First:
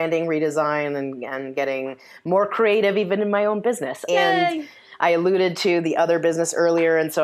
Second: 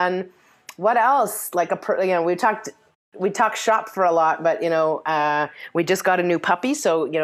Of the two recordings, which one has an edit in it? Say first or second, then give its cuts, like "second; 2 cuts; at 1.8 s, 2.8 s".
first; 1 cut; at 4.1 s